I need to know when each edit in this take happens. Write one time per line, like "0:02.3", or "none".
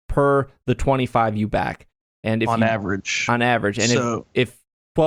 none